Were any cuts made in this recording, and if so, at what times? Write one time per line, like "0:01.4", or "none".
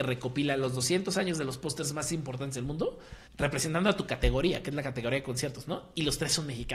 0:03.3